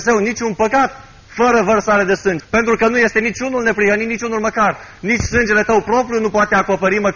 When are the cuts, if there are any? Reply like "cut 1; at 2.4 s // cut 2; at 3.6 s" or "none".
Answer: cut 1; at 2.4 s